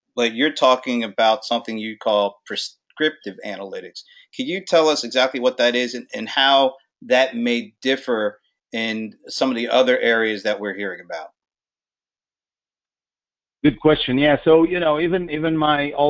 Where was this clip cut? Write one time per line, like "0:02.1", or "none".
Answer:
none